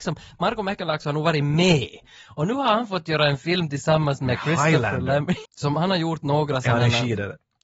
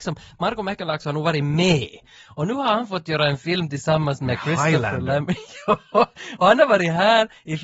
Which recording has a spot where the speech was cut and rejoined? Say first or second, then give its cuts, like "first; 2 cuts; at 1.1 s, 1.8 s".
first; 1 cut; at 5.5 s